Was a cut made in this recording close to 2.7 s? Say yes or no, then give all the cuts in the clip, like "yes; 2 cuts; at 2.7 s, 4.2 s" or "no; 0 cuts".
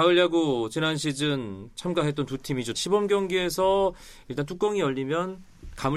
yes; 1 cut; at 2.7 s